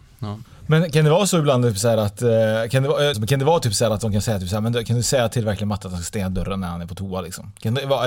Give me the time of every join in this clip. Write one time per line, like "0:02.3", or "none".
0:03.1